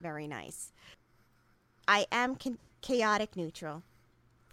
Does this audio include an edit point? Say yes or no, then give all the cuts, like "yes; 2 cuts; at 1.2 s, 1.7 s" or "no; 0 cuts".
yes; 1 cut; at 1.8 s